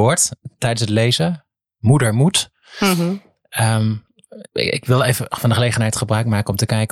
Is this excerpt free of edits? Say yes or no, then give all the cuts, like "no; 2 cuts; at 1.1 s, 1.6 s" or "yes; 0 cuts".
yes; 0 cuts